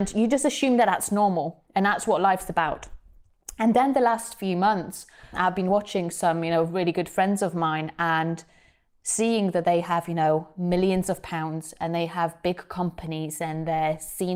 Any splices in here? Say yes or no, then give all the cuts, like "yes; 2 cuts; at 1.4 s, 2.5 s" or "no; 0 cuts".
yes; 1 cut; at 5.3 s